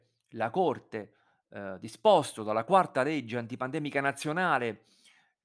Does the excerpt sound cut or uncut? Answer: uncut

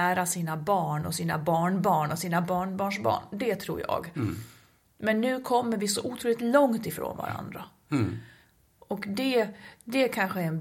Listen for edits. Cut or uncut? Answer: uncut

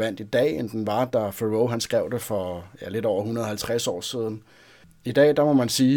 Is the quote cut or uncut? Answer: uncut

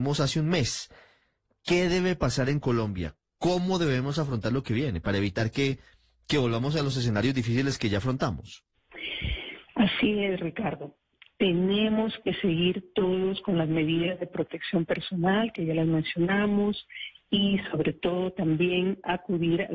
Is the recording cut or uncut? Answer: uncut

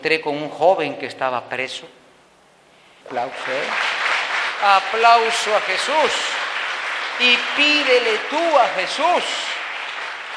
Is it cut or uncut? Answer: cut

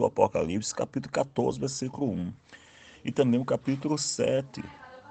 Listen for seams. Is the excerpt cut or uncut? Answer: uncut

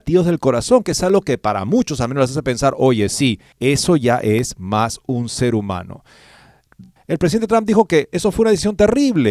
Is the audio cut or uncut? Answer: cut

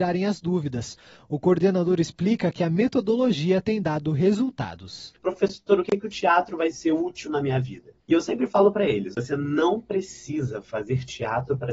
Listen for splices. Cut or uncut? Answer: cut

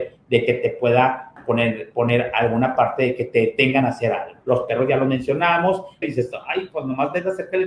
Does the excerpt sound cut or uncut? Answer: cut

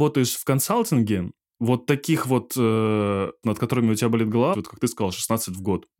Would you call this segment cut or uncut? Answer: cut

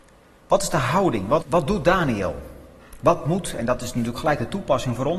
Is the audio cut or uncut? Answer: cut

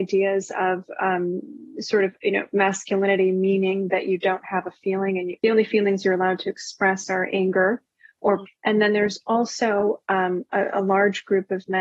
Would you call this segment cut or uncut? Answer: cut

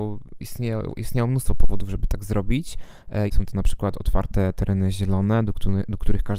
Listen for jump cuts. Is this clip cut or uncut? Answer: cut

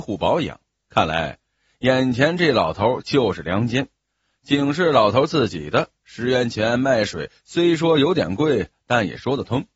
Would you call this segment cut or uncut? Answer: uncut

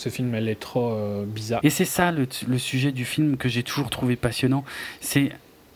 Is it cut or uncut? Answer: cut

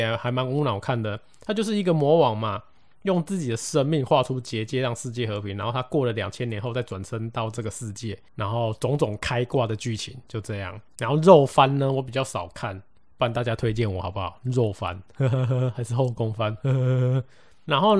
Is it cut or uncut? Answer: uncut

